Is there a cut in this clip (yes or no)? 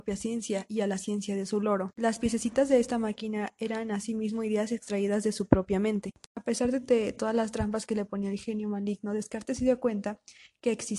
yes